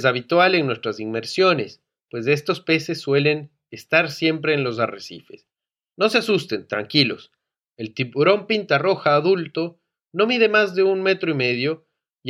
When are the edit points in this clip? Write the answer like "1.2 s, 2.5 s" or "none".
5.9 s